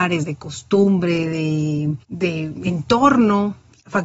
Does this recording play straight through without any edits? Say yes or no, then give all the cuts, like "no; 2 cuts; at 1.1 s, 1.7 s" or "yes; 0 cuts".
no; 1 cut; at 2.0 s